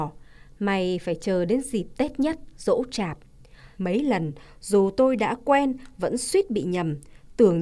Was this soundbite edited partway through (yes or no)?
yes